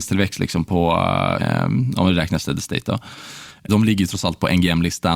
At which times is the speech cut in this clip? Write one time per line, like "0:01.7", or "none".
0:01.4
0:03.7